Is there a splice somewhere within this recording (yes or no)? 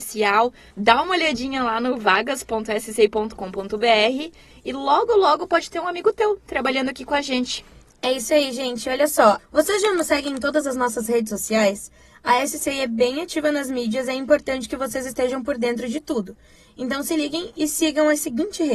yes